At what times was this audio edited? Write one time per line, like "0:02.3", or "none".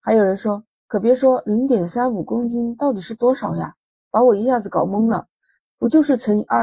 0:05.6